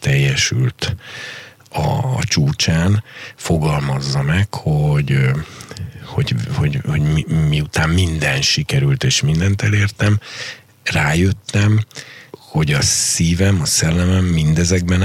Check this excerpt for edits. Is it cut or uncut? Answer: cut